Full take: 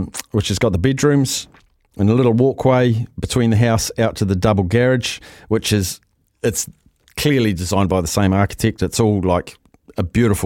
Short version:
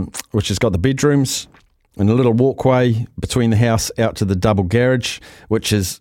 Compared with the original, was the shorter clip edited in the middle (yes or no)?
no